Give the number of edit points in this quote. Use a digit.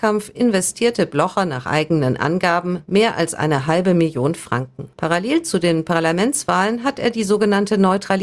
1